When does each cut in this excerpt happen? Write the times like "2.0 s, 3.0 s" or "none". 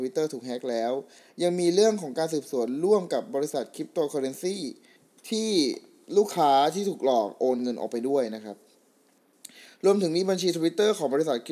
none